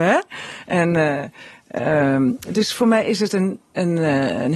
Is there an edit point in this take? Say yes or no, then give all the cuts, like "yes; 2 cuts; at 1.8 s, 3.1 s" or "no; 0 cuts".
no; 0 cuts